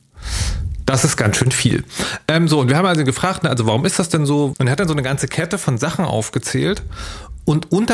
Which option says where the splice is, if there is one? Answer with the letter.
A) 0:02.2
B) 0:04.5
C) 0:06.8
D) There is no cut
B